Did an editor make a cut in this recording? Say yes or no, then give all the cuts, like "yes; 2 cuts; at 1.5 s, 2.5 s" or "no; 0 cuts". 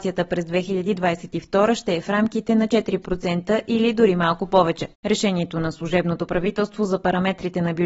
yes; 1 cut; at 4.9 s